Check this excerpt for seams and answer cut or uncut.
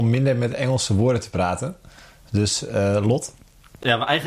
uncut